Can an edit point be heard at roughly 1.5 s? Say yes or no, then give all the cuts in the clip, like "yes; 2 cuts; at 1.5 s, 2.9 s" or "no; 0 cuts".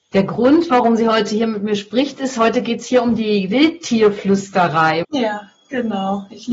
no; 1 cut; at 5.0 s